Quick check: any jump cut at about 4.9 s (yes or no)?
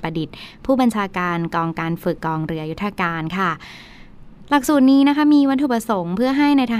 no